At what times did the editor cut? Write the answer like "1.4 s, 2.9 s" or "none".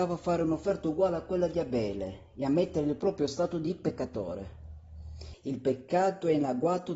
5.3 s